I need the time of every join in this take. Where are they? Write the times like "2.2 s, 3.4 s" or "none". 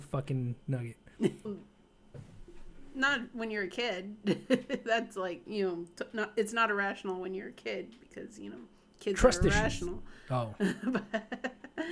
1.4 s